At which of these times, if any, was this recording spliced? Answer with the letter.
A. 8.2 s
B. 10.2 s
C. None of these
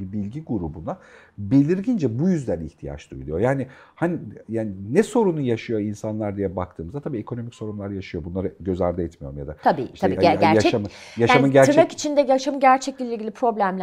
C